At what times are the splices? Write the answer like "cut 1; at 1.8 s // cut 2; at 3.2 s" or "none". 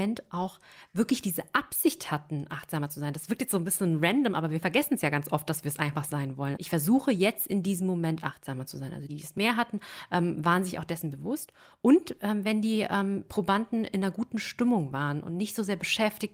cut 1; at 6.6 s // cut 2; at 9.1 s